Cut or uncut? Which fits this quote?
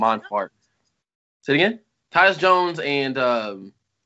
cut